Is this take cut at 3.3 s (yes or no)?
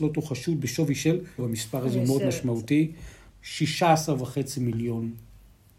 yes